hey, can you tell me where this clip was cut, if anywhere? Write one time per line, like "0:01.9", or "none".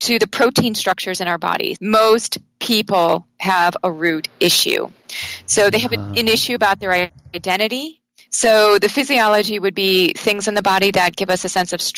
0:01.8
0:08.3